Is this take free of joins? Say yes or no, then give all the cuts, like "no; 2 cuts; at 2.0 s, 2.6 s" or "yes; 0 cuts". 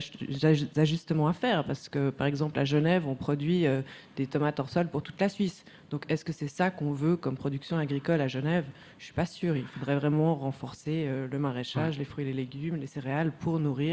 yes; 0 cuts